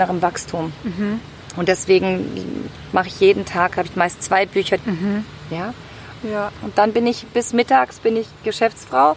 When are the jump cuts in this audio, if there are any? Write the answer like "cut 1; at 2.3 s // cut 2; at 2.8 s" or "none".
cut 1; at 4.8 s // cut 2; at 6.2 s